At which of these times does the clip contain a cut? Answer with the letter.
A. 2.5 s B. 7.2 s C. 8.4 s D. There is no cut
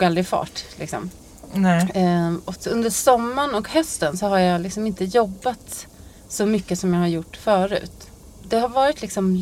A